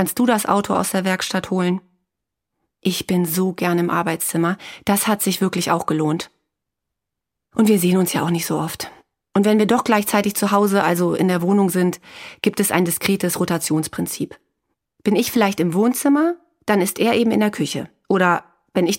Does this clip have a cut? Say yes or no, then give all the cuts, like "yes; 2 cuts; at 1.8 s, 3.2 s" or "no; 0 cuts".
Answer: no; 0 cuts